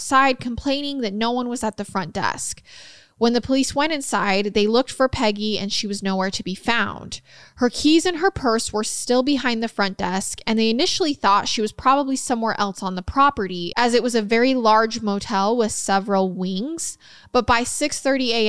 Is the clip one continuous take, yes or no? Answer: yes